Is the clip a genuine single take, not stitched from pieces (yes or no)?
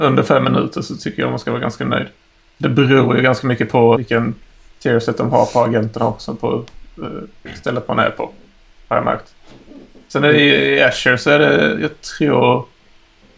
no